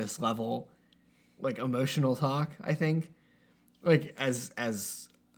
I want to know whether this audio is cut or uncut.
uncut